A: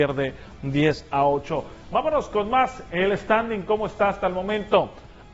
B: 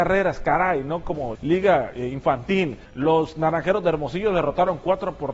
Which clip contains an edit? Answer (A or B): B